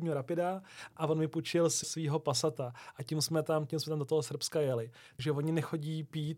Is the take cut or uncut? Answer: cut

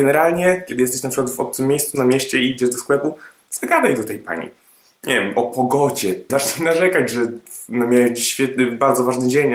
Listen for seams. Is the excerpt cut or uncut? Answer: cut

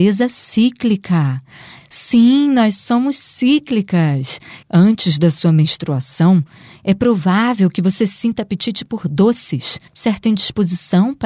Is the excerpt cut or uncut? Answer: cut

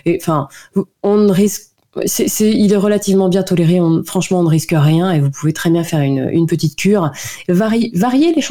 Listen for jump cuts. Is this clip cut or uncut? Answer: uncut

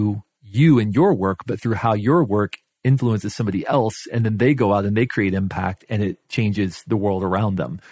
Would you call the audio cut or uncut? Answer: uncut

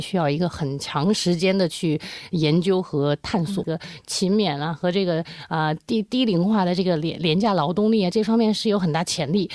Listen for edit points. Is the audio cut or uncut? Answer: cut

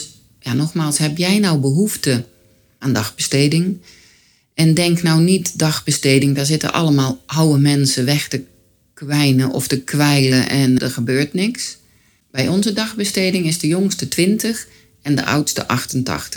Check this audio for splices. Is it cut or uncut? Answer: cut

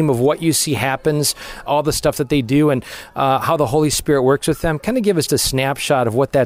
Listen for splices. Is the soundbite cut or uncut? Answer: cut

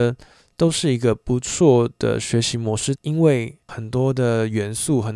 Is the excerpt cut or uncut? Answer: cut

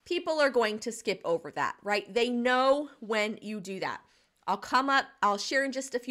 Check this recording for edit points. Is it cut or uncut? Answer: uncut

